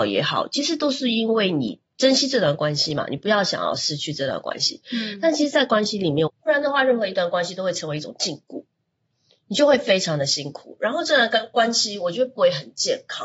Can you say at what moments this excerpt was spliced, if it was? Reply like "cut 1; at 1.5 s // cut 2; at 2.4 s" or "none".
cut 1; at 1.8 s // cut 2; at 6.3 s